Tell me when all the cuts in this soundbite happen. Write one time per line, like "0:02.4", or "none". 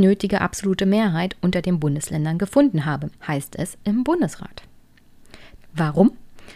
0:03.2
0:05.6